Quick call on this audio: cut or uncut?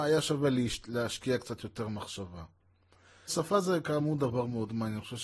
cut